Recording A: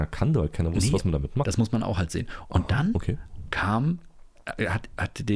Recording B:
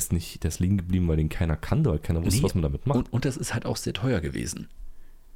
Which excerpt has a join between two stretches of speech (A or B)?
A